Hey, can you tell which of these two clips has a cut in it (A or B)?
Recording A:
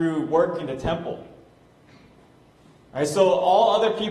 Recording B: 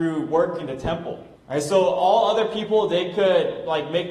B